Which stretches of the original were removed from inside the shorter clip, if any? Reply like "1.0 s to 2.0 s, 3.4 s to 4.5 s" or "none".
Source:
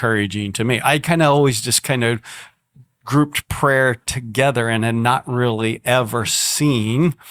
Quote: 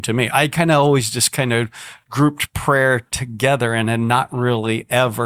2.5 s to 3.0 s

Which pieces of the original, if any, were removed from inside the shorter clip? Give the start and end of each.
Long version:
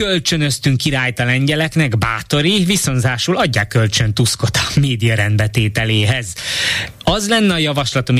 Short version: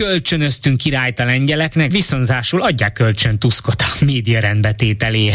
1.9 s to 2.7 s

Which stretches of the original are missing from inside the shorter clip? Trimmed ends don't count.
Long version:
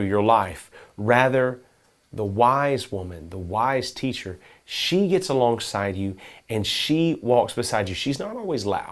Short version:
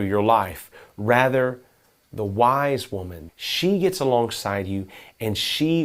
3.3 s to 4.6 s

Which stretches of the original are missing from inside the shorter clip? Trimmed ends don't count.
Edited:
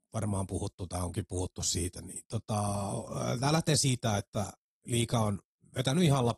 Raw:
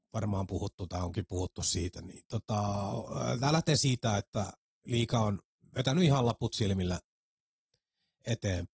none

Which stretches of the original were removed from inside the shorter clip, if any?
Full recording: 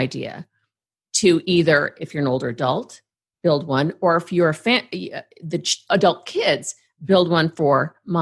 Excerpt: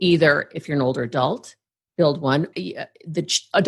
4.0 s to 4.9 s

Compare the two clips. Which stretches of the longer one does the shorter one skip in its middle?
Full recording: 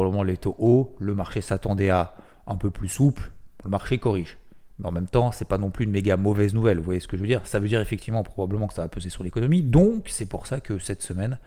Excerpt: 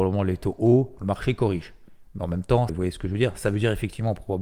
1.0 s to 3.6 s, 5.3 s to 6.8 s

